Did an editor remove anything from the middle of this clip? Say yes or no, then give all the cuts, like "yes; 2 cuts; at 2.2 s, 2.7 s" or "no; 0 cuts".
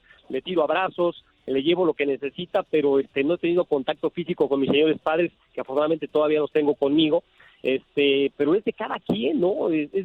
no; 0 cuts